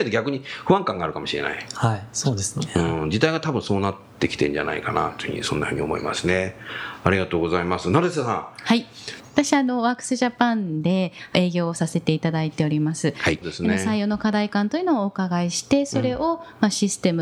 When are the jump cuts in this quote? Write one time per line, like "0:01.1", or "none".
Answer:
0:09.2
0:13.4